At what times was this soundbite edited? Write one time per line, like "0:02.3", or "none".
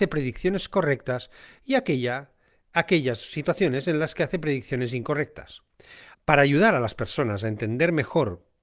0:06.1